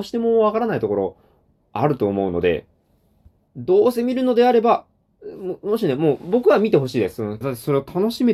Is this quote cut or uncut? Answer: cut